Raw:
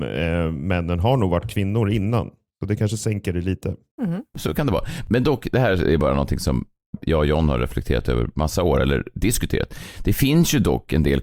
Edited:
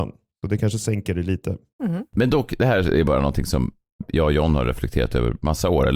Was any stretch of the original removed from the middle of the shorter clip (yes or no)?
yes